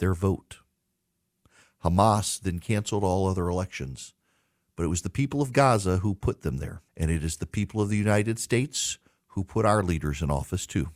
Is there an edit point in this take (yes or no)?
yes